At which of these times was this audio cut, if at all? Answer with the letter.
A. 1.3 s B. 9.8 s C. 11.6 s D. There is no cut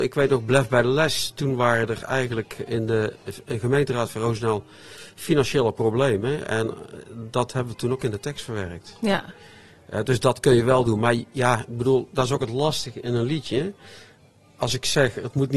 D